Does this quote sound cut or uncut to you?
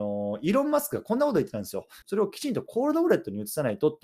cut